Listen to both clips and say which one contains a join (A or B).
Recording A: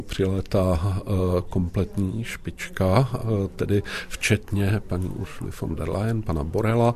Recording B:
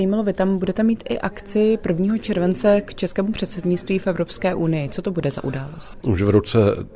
B